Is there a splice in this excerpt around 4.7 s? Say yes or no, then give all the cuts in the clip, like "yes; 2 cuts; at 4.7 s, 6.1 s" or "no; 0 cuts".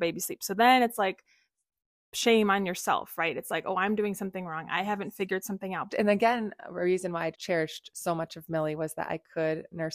no; 2 cuts; at 5.9 s, 7.3 s